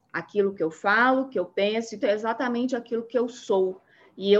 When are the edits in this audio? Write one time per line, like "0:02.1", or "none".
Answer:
0:02.0